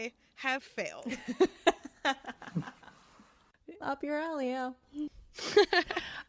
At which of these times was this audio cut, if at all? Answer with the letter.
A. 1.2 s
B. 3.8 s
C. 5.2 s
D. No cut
B